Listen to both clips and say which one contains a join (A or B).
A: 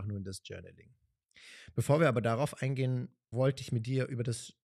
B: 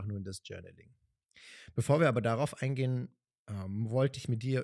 A